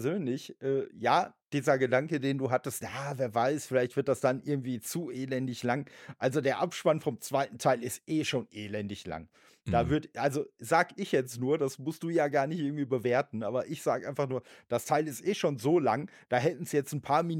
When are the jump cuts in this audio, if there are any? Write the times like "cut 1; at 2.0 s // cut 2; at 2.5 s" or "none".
none